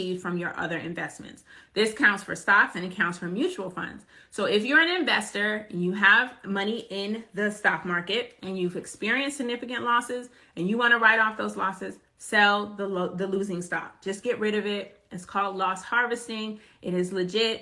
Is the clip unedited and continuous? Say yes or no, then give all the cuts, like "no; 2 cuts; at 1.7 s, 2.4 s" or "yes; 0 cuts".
yes; 0 cuts